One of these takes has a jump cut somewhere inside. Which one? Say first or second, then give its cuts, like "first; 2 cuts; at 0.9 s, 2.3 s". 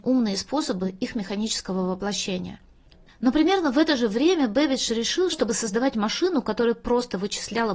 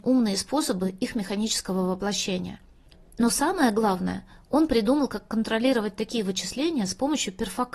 first; 2 cuts; at 3.1 s, 5.3 s